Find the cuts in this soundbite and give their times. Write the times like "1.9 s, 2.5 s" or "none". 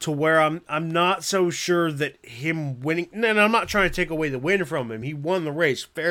none